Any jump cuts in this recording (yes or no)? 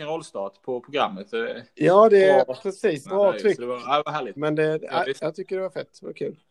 yes